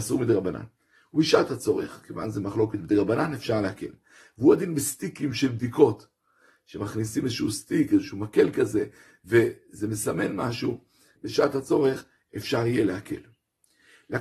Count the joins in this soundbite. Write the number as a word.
one